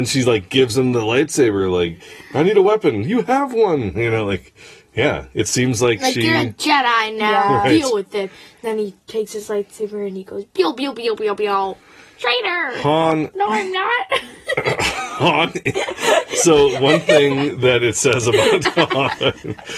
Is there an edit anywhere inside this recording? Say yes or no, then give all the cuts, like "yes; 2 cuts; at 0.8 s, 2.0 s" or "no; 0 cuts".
no; 0 cuts